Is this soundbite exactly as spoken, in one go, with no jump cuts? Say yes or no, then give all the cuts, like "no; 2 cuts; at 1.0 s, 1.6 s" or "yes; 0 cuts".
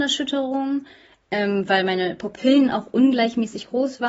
yes; 0 cuts